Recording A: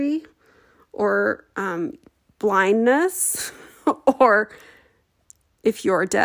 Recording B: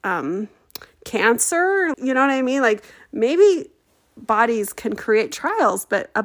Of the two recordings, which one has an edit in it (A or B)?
B